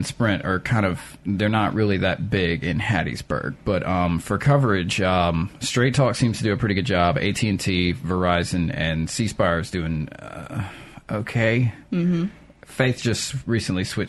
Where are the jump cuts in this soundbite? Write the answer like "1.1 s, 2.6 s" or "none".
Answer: none